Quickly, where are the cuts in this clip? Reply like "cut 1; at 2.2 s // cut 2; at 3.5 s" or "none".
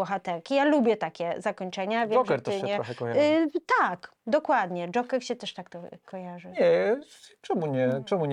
none